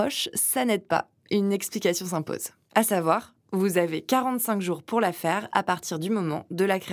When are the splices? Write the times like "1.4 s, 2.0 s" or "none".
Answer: 2.7 s